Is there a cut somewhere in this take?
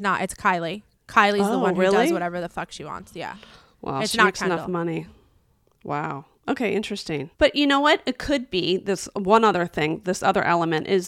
no; 0 cuts

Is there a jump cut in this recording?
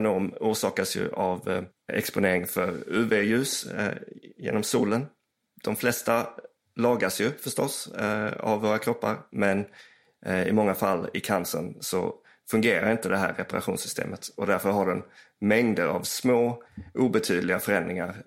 yes; 1 cut; at 5.5 s

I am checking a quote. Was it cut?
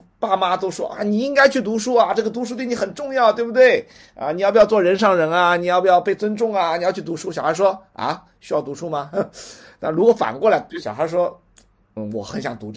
no; 0 cuts

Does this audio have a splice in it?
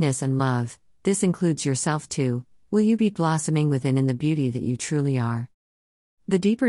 no; 0 cuts

